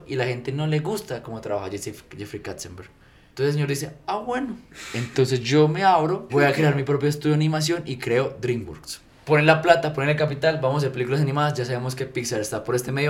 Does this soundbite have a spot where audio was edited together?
yes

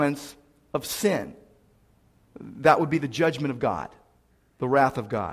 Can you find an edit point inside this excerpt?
no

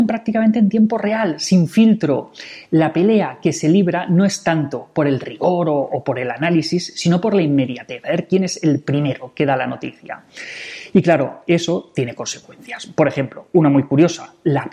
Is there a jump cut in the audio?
no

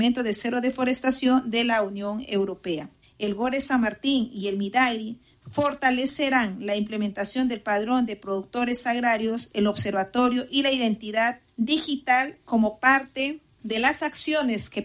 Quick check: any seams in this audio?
no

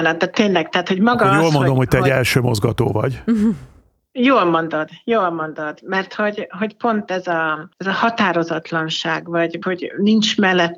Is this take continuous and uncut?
no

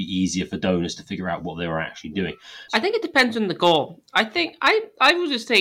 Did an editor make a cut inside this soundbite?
yes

